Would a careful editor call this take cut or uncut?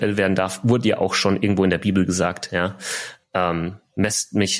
uncut